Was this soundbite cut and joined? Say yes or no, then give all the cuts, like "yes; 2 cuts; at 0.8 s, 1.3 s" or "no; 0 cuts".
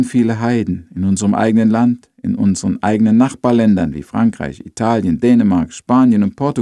no; 0 cuts